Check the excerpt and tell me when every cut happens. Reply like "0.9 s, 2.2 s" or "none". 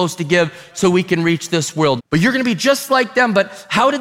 2.0 s